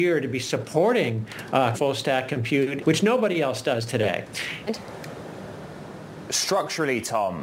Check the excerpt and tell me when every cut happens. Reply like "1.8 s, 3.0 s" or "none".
1.7 s, 2.8 s, 4.7 s